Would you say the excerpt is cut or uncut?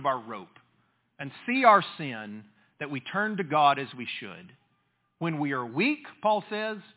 uncut